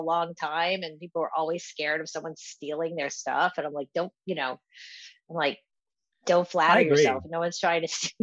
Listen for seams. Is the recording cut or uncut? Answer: uncut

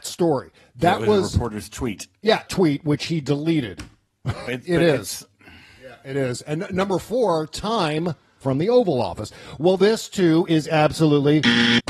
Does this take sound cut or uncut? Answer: cut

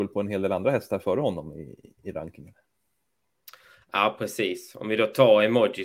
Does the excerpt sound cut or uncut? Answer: uncut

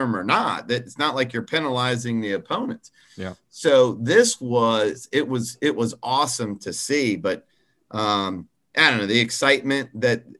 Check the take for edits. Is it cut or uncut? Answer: uncut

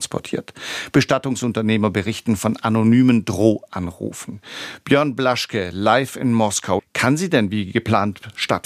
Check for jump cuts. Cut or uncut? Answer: cut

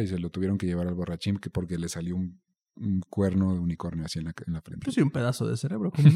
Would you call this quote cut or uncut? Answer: uncut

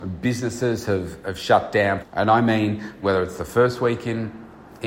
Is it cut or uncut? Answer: cut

